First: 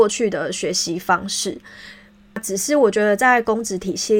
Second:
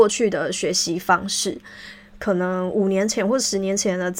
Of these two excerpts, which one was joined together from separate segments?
second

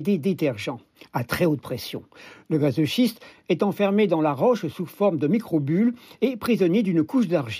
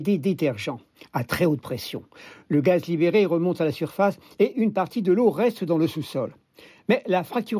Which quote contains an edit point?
first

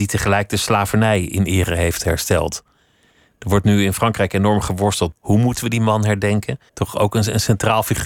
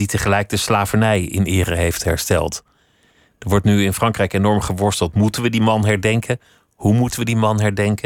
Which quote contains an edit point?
first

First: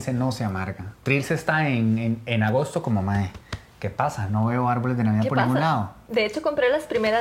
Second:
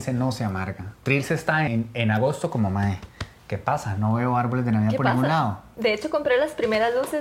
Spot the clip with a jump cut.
second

